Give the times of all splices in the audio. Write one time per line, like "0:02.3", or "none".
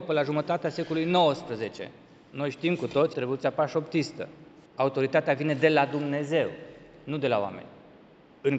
0:03.1
0:04.7